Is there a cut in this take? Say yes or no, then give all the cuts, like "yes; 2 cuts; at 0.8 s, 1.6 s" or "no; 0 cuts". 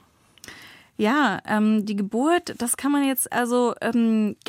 no; 0 cuts